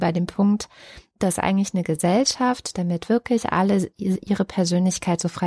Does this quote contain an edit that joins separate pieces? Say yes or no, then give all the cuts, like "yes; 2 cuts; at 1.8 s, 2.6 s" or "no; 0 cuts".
no; 0 cuts